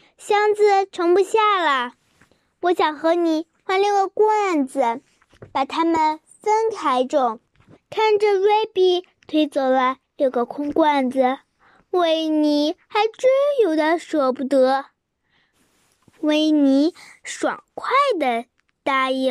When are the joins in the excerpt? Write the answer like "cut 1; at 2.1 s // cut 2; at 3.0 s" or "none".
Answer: cut 1; at 7.8 s // cut 2; at 15.5 s